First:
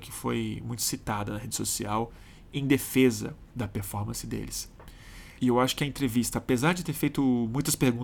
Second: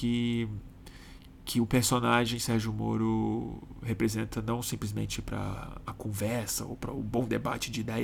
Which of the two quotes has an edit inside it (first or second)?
first